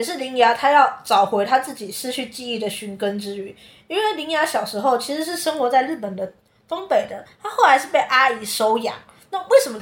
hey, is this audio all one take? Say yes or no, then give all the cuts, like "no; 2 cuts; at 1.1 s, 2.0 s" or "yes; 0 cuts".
yes; 0 cuts